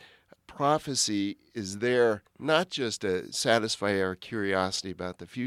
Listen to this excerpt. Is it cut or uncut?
uncut